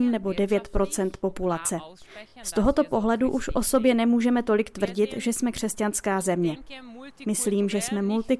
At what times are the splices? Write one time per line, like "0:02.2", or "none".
none